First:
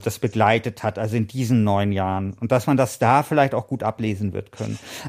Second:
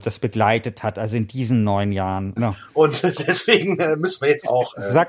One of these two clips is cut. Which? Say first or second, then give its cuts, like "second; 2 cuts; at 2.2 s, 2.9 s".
second; 1 cut; at 2.4 s